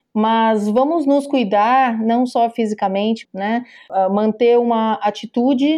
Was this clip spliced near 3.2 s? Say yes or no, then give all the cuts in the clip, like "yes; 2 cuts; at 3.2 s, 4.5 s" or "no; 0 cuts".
yes; 1 cut; at 3.2 s